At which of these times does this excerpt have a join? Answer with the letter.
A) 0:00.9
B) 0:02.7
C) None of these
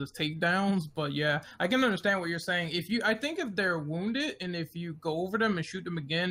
C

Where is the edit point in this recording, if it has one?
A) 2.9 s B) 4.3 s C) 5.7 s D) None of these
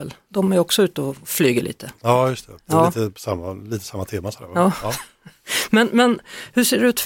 D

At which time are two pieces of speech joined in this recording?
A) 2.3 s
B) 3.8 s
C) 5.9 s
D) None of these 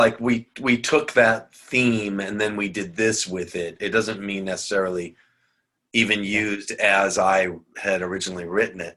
D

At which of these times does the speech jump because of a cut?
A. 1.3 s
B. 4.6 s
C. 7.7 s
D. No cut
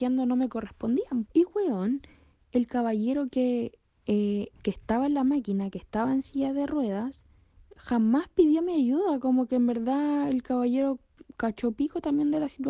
A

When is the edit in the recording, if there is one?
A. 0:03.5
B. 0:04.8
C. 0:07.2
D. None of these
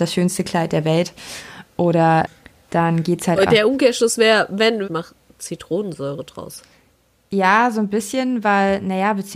B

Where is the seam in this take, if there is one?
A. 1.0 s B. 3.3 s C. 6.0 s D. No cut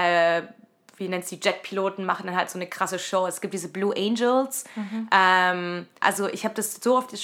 C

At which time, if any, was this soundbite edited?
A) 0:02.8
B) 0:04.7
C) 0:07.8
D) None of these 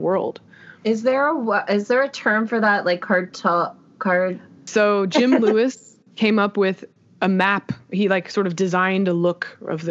B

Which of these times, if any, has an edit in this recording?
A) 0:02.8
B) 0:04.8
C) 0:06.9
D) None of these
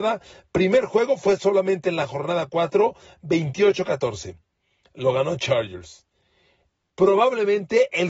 C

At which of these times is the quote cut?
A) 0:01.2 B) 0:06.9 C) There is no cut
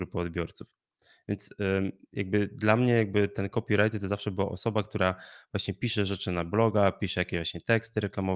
C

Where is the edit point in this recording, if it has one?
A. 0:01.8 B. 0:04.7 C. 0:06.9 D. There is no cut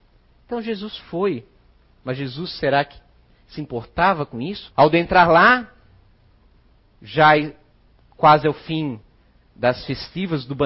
B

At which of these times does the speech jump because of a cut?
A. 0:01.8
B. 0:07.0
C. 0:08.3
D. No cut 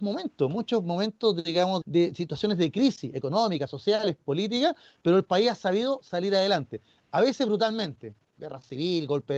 A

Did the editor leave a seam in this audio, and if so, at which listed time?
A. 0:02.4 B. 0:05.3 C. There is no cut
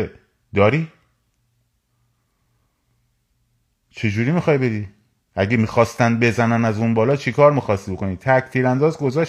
C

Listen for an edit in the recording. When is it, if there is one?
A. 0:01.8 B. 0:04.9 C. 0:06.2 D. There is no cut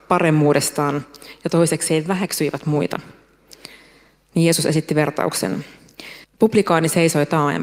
C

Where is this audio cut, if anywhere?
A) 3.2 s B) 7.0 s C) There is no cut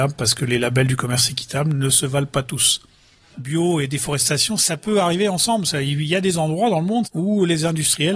B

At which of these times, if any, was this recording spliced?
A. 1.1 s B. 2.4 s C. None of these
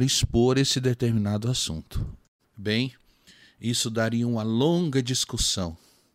B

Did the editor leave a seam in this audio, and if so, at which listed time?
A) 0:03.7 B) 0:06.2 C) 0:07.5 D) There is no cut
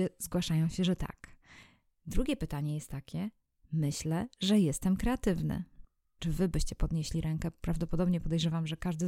B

